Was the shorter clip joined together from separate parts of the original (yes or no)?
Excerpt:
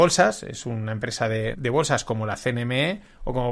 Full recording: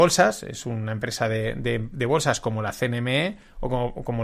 yes